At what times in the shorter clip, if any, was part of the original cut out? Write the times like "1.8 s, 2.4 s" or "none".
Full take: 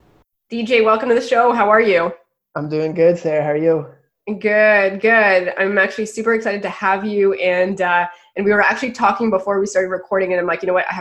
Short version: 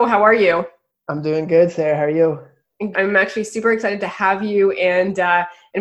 2.9 s

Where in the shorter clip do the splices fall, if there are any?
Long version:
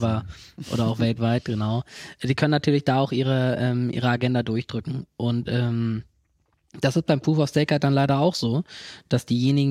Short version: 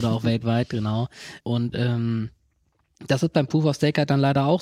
1.4 s

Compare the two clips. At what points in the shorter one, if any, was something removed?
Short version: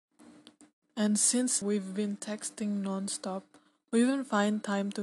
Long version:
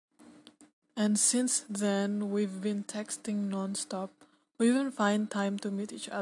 1.6 s

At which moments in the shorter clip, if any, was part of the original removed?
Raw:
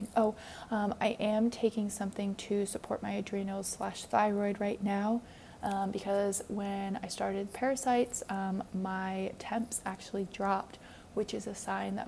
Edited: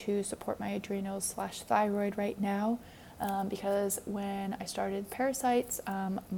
none

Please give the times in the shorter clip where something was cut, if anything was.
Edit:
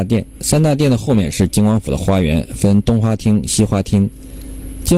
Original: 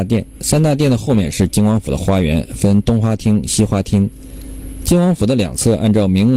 none

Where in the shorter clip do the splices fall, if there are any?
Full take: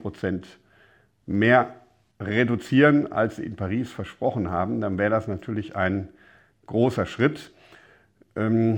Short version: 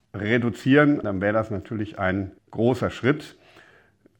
1.0 s, 2.4 s

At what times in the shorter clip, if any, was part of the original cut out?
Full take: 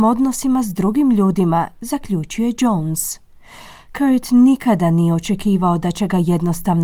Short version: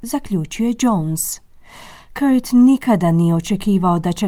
none

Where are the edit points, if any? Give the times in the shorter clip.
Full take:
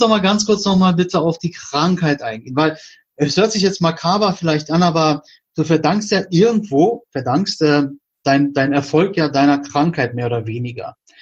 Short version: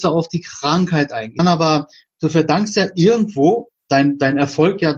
1.4 s, 3.7 s

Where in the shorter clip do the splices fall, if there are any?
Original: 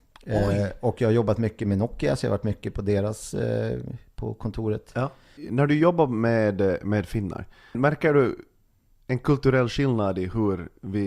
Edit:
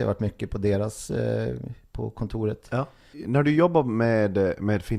none

